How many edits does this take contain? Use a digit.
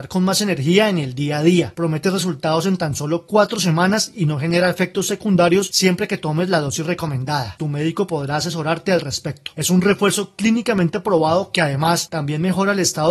2